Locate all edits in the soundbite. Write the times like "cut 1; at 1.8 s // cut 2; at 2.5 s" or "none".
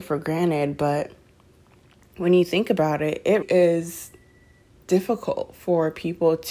cut 1; at 3.4 s